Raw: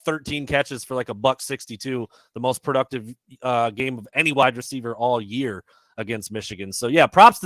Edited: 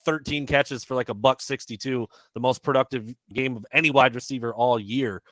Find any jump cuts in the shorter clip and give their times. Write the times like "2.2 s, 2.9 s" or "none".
3.3 s